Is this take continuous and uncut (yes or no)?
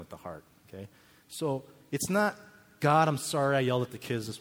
yes